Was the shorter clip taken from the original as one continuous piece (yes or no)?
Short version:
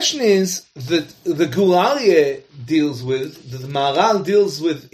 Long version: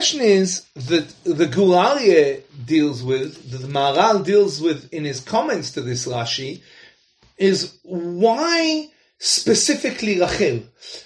yes